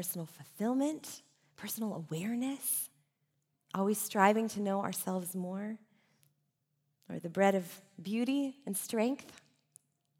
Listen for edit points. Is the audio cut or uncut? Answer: uncut